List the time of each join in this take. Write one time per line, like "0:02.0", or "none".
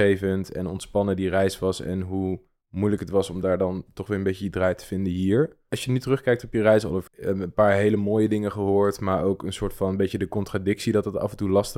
0:05.7
0:07.1